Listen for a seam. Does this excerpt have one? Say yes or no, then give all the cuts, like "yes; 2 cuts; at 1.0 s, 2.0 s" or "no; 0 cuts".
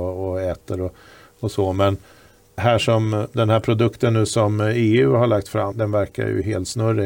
yes; 2 cuts; at 2.6 s, 5.7 s